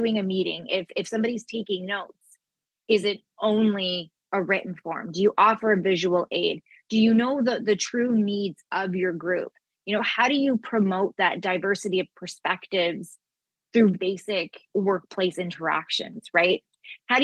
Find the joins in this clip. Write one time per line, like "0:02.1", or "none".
0:13.9